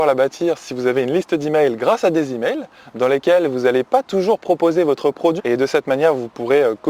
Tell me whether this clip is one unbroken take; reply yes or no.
no